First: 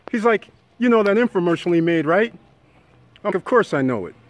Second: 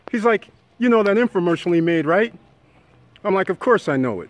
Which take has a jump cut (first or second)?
first